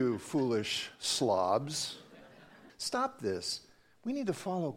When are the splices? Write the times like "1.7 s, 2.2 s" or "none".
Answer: 2.7 s